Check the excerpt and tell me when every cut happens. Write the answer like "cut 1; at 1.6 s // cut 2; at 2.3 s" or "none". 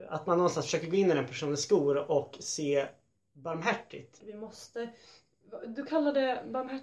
cut 1; at 4.2 s